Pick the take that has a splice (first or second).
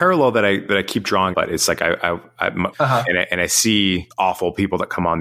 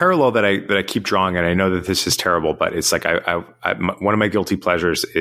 first